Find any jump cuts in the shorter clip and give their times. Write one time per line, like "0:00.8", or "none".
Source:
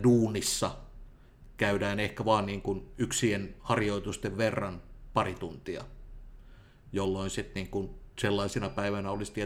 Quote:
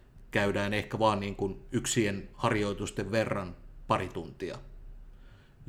none